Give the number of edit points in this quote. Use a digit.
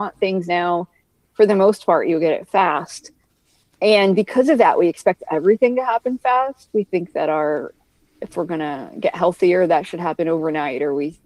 0